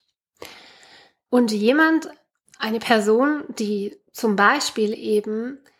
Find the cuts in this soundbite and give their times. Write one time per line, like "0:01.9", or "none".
0:01.3
0:04.1